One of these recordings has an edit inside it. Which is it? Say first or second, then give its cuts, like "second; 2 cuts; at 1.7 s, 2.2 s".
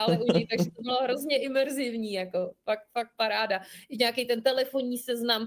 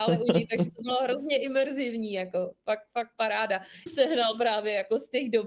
second; 1 cut; at 3.9 s